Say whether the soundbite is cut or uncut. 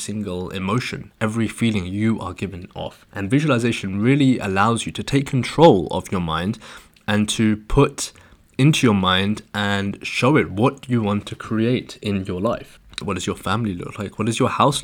cut